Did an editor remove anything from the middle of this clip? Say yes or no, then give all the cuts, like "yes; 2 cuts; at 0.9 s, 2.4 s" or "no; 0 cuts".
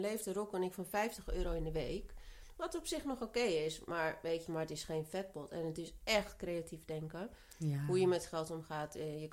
yes; 1 cut; at 4.5 s